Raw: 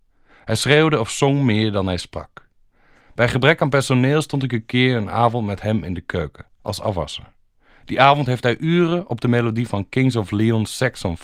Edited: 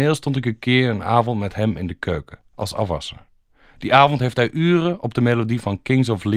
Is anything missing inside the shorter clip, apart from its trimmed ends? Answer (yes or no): no